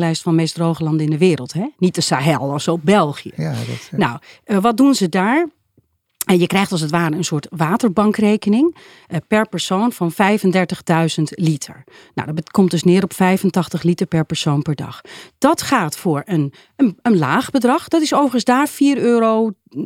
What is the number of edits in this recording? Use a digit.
0